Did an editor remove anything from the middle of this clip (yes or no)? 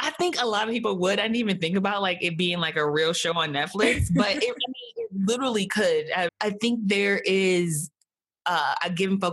yes